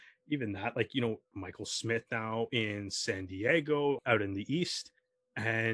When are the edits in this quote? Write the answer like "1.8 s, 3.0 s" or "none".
1.3 s, 4.0 s